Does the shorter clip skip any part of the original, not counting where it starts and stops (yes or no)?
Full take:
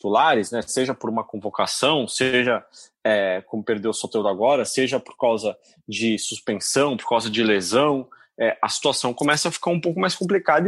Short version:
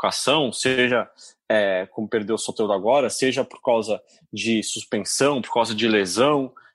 no